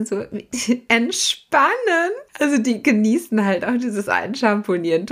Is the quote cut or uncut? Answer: uncut